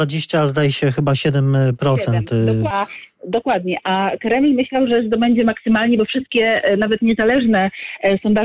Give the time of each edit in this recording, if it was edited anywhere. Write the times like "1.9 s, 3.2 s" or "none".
2.7 s